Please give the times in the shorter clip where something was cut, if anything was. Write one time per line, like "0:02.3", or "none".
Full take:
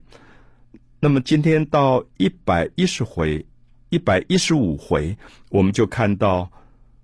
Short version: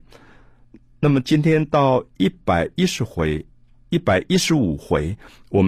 none